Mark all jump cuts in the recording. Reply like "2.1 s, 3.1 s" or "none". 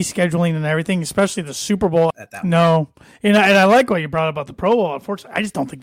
2.1 s